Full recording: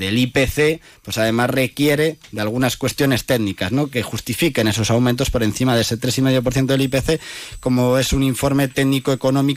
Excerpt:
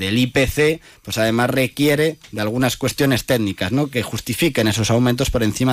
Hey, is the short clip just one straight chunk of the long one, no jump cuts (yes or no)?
yes